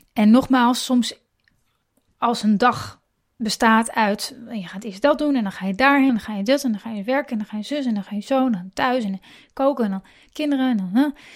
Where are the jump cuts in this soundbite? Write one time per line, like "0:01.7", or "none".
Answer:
0:06.1